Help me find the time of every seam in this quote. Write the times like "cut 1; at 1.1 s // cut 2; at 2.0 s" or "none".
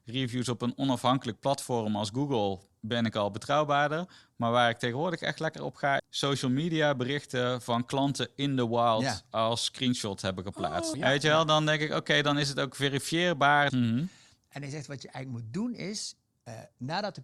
cut 1; at 6.0 s // cut 2; at 10.9 s // cut 3; at 13.7 s